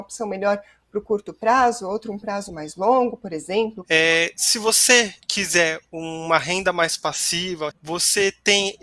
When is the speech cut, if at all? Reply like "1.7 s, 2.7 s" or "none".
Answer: 3.8 s, 5.2 s, 7.7 s